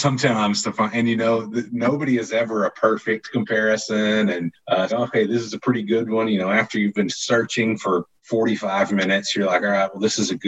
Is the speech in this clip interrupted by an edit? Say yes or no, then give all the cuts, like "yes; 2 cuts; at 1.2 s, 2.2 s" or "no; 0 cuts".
yes; 1 cut; at 4.9 s